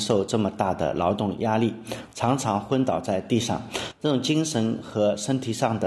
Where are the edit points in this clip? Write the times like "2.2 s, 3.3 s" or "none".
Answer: none